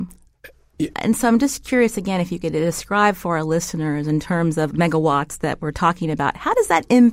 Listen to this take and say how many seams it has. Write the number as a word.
one